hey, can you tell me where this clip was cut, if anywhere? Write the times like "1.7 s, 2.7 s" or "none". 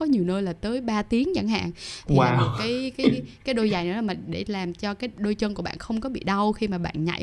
none